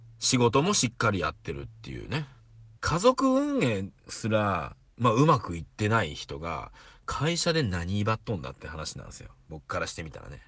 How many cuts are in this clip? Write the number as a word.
one